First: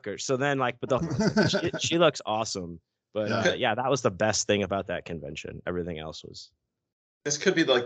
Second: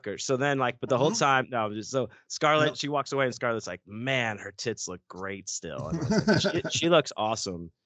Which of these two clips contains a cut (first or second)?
first